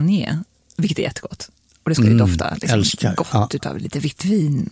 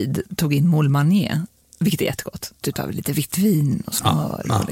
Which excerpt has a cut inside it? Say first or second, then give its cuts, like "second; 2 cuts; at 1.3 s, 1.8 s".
second; 1 cut; at 2.6 s